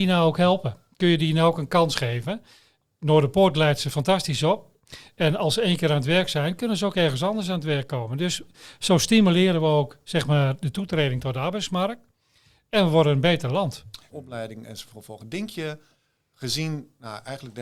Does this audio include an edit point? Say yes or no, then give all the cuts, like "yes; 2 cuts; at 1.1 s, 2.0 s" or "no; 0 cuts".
yes; 1 cut; at 14.1 s